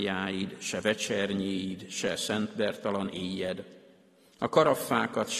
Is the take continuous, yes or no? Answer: yes